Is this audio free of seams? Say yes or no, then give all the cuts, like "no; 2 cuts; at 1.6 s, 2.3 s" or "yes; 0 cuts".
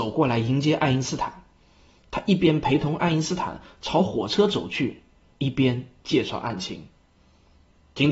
yes; 0 cuts